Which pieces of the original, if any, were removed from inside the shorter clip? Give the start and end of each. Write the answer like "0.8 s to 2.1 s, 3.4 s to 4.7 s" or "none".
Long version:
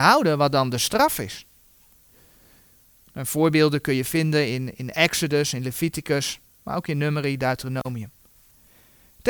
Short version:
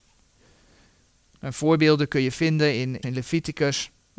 4.8 s to 5.5 s